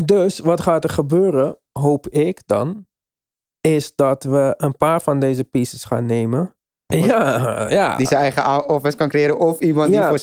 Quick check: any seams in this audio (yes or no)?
yes